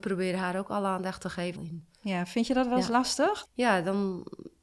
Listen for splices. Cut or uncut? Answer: cut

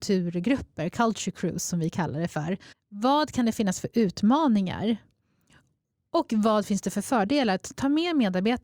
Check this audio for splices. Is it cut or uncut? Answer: cut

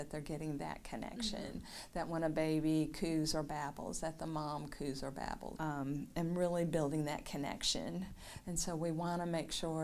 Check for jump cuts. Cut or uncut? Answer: cut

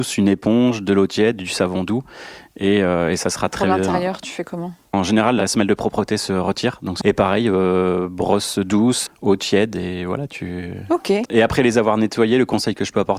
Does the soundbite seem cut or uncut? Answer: cut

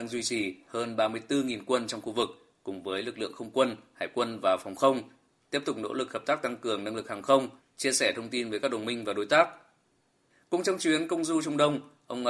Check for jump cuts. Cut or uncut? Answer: cut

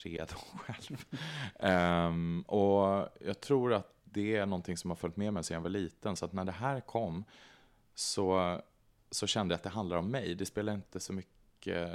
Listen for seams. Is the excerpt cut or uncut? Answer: uncut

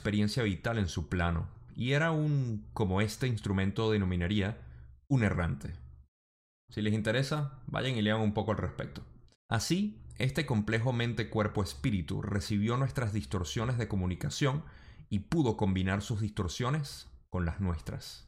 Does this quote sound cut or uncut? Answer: cut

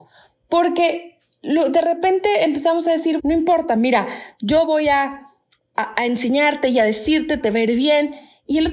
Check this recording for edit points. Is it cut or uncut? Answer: cut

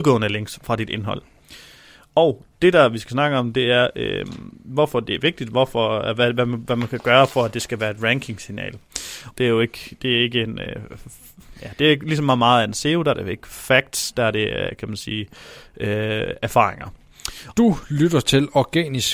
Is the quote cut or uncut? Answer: cut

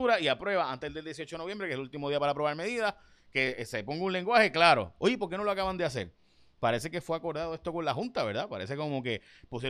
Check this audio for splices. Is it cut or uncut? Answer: uncut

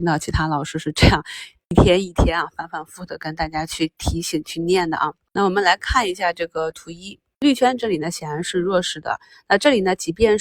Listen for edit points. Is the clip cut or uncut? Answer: uncut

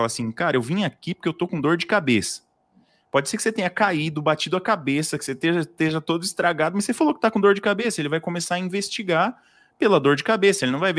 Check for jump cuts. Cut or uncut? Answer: uncut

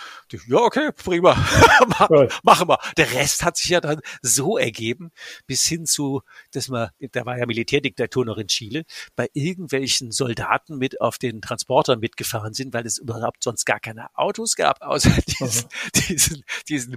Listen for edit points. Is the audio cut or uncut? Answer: uncut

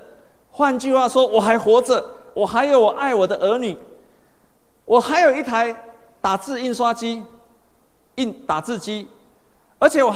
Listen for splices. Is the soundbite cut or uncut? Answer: uncut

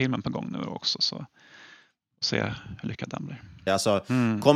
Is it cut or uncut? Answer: cut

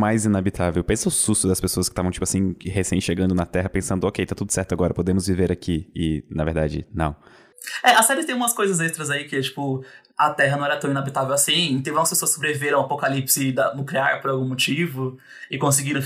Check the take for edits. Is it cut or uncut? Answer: uncut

